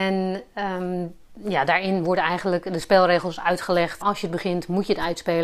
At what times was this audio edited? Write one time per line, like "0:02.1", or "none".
0:04.0